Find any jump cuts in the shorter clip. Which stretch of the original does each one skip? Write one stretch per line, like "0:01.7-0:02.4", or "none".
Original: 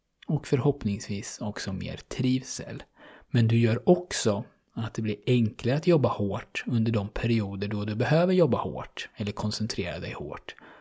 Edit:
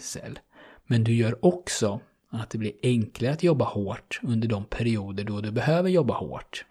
none